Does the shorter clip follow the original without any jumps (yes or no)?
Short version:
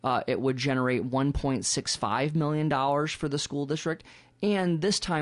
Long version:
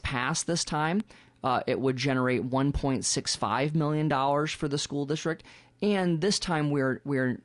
yes